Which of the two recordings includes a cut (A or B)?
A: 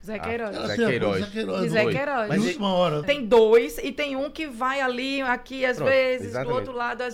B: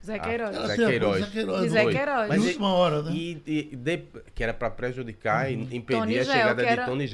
A